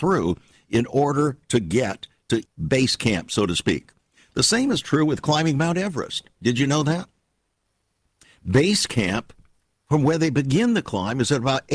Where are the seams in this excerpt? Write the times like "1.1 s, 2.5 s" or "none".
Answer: 2.4 s